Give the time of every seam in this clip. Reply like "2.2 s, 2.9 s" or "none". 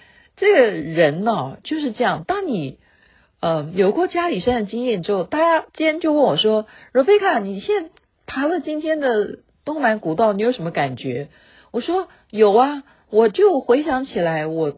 none